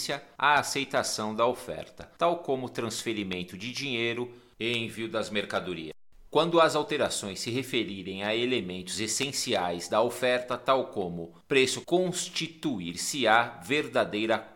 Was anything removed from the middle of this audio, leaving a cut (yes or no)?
yes